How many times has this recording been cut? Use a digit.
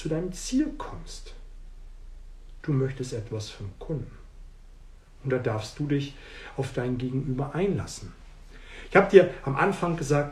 1